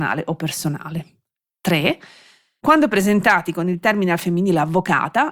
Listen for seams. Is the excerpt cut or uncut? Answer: uncut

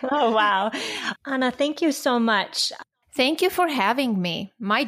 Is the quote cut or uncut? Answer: cut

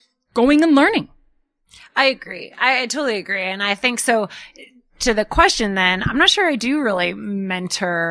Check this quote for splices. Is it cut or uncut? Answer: uncut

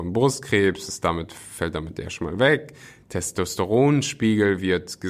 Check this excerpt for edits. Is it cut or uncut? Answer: uncut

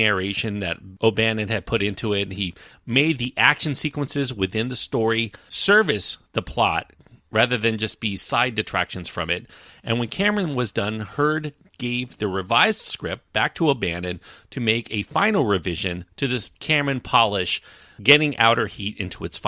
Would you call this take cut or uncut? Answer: uncut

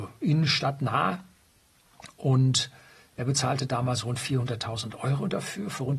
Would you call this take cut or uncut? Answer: uncut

